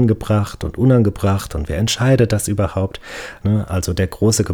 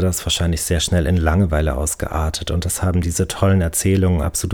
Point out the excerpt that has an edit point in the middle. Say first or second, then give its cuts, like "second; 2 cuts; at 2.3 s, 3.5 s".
first; 1 cut; at 3.4 s